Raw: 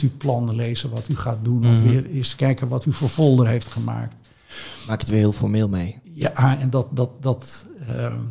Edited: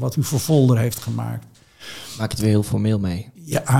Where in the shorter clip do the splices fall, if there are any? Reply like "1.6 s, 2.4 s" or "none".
none